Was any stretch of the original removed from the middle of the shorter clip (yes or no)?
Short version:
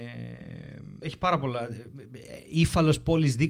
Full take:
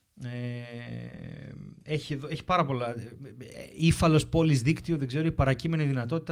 yes